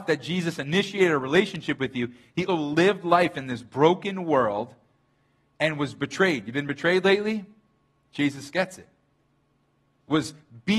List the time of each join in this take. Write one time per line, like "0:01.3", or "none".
0:02.5